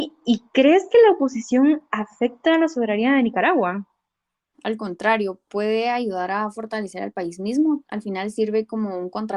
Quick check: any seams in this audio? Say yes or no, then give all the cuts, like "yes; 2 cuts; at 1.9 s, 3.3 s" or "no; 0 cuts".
yes; 2 cuts; at 4.5 s, 7.8 s